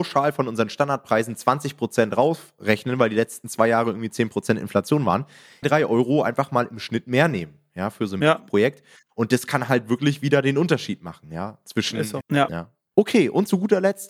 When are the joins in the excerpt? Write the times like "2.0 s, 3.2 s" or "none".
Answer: 5.6 s, 12.2 s

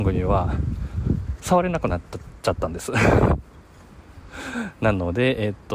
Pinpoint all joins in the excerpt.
3.6 s

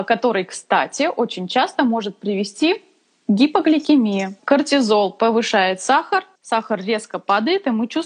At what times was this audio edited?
4.4 s, 6.4 s

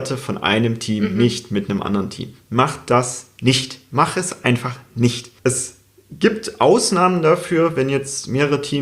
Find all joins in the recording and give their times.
5.4 s

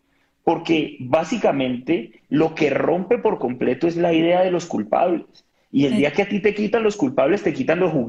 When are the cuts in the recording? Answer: none

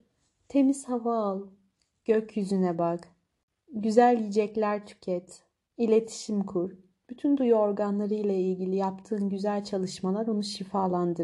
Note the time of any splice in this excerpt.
5.7 s

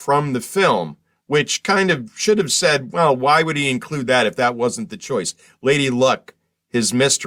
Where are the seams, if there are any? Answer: none

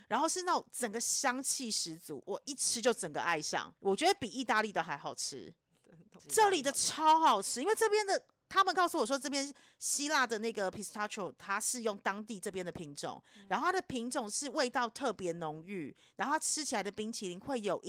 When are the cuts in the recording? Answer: 3.8 s, 6.2 s

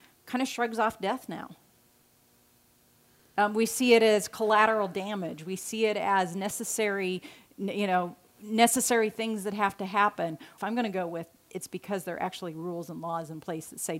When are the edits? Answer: 10.6 s

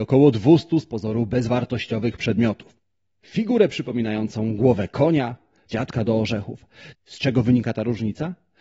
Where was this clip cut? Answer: 5.7 s, 6.9 s

